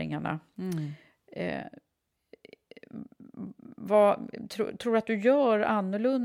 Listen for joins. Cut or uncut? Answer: uncut